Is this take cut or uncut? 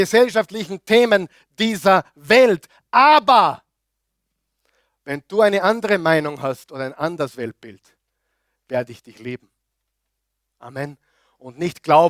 uncut